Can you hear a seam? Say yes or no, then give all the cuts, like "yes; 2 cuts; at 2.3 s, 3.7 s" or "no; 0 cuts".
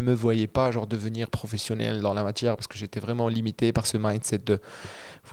no; 0 cuts